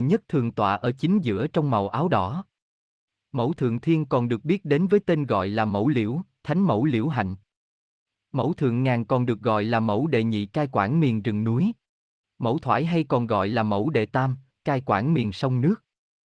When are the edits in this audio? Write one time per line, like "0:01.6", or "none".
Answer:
0:12.2
0:14.5